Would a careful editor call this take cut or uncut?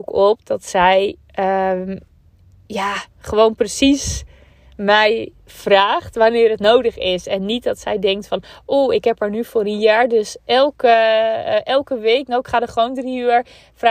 uncut